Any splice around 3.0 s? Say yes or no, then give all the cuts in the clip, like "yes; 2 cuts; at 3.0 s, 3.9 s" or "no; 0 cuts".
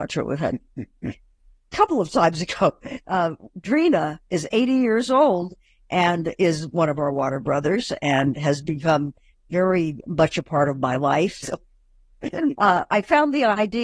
no; 1 cut; at 11.4 s